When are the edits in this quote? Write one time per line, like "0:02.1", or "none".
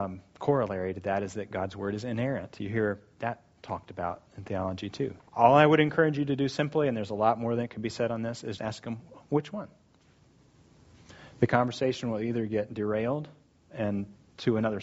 0:05.2
0:08.6